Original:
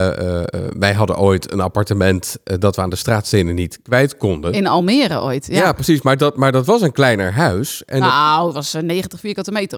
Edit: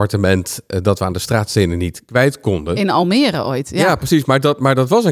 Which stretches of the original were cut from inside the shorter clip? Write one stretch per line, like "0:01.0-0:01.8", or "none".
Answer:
none